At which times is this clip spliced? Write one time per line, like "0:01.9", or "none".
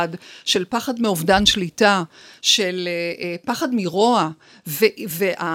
none